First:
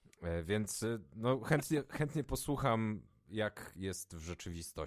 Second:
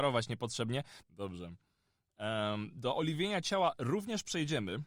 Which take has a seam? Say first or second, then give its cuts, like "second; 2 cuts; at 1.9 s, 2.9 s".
second; 1 cut; at 1.0 s